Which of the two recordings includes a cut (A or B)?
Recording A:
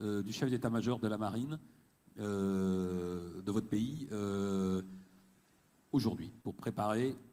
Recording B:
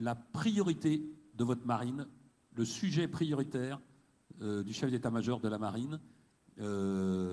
A